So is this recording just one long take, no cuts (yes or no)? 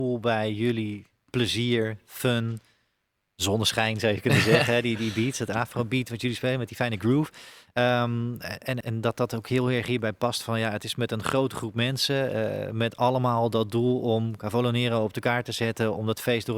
no